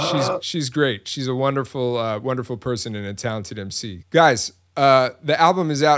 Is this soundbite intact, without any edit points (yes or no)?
no